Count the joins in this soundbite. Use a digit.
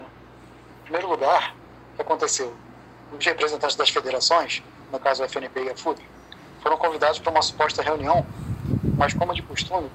0